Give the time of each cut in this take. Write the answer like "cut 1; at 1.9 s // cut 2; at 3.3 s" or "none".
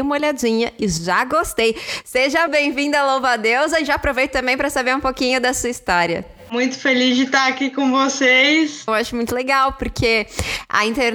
cut 1; at 2.5 s // cut 2; at 8.9 s